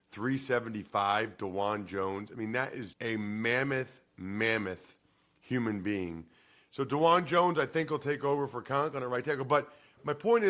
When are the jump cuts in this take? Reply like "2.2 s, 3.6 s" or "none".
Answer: 2.9 s